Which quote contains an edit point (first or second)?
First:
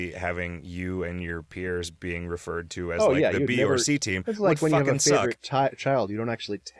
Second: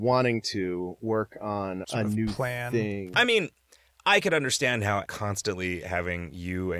second